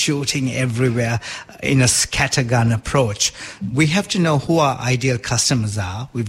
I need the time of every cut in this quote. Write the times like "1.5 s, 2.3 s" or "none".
none